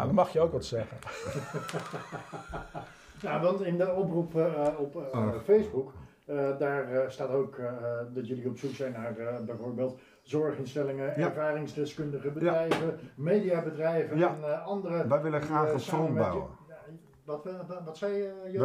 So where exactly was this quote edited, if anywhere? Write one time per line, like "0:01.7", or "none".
none